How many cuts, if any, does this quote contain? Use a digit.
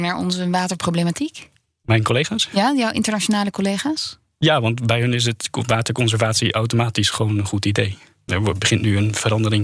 1